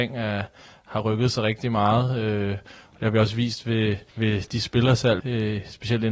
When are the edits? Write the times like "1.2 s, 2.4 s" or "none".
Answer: 4.1 s, 5.2 s